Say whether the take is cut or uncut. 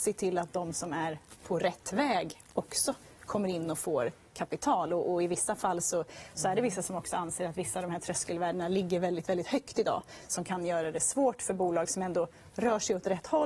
uncut